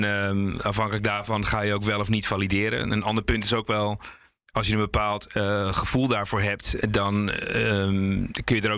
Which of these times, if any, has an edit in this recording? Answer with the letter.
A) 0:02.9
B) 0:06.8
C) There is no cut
B